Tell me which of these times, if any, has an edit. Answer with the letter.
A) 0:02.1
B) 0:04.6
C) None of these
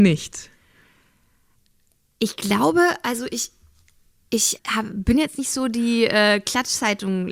B